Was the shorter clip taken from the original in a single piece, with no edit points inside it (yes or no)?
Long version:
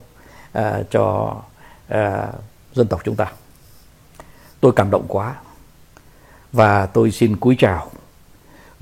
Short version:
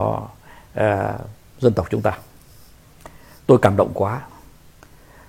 yes